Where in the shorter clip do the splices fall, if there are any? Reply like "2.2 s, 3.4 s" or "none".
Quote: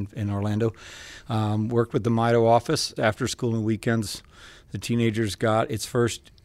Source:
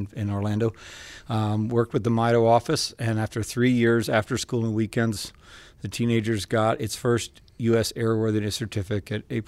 3.0 s